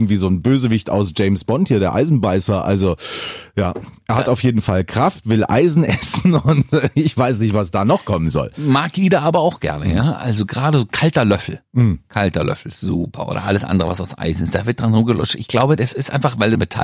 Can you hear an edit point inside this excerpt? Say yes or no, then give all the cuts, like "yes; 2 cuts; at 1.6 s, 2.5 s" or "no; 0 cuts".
no; 0 cuts